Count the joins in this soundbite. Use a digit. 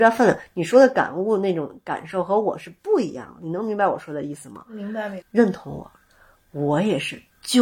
1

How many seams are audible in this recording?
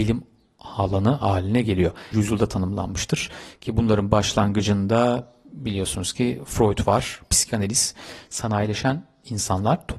2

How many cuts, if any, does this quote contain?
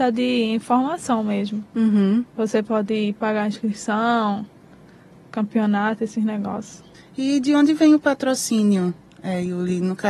2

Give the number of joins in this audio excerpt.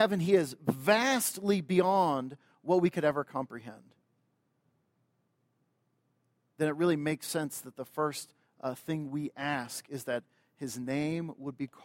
0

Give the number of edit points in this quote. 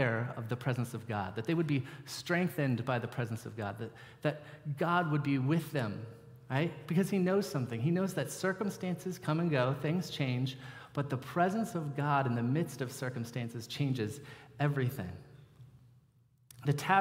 0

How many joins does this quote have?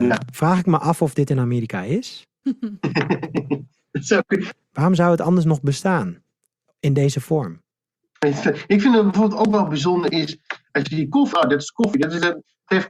2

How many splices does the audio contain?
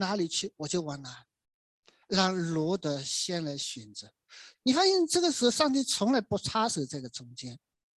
2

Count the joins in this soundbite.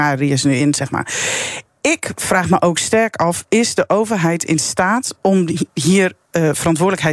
0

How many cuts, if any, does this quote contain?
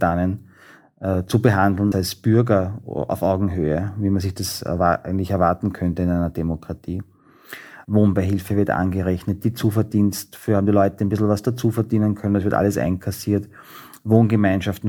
2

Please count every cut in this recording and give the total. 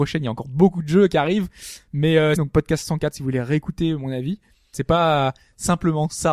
2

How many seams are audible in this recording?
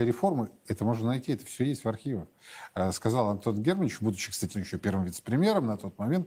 1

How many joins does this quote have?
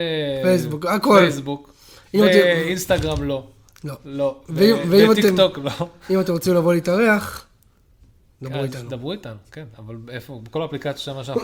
0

